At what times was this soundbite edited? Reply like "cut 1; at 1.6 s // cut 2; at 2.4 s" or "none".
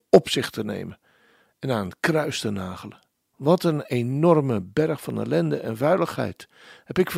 cut 1; at 3.2 s